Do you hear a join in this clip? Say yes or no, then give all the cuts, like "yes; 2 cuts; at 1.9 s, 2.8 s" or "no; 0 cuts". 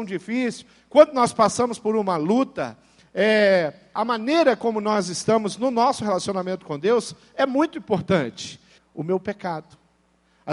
yes; 2 cuts; at 4.0 s, 8.8 s